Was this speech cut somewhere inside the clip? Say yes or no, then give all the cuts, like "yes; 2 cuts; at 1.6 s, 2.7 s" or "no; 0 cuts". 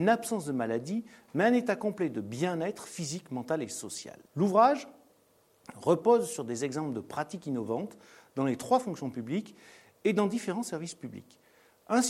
yes; 1 cut; at 4.3 s